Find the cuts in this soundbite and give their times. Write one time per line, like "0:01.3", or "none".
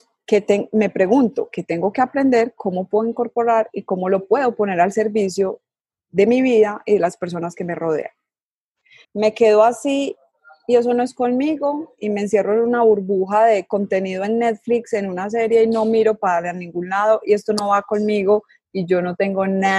0:09.0